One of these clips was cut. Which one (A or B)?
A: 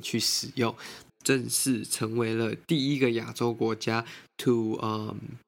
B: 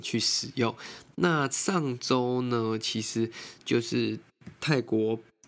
A